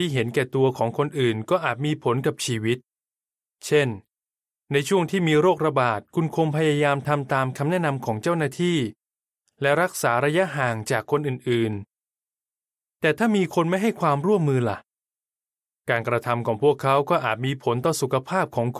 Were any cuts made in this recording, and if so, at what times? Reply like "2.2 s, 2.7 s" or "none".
none